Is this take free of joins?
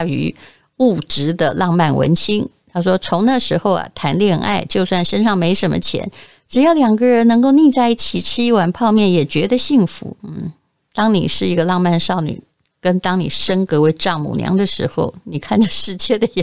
no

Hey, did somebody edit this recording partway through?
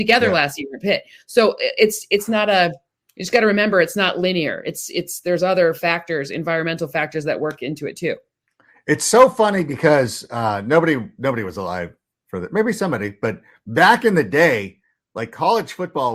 no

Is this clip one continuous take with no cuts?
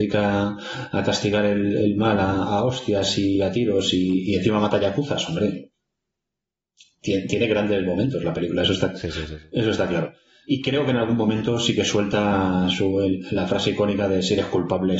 yes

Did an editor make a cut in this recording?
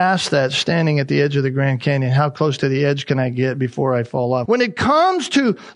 yes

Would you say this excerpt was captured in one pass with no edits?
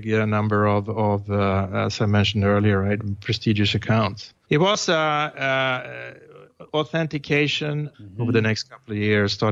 no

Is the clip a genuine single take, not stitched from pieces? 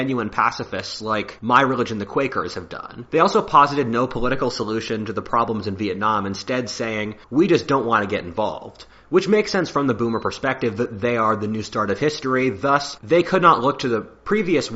no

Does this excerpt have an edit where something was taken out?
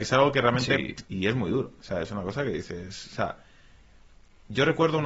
yes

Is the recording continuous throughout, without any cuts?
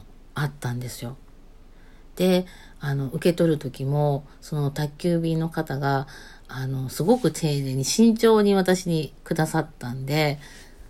yes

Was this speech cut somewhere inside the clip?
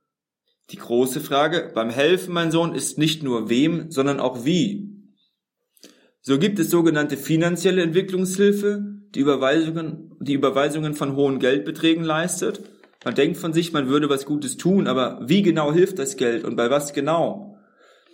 no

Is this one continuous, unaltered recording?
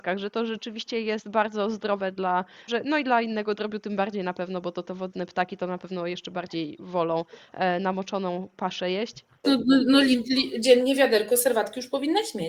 no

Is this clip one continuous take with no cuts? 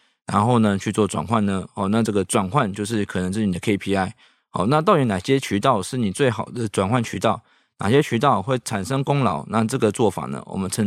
yes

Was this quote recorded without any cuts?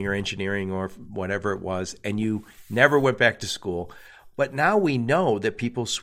yes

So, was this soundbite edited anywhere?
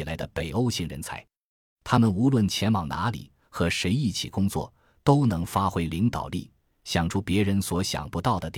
no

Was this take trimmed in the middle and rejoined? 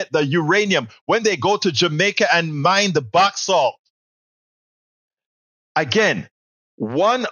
no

